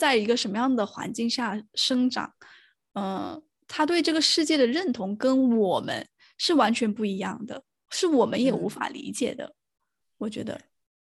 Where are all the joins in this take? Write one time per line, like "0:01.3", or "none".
none